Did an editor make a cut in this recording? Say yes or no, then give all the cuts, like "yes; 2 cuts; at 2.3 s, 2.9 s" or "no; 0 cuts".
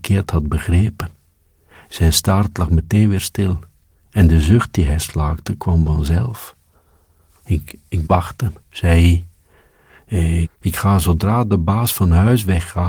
yes; 2 cuts; at 8.0 s, 10.4 s